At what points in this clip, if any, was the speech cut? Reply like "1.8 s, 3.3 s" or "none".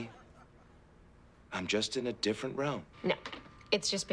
2.9 s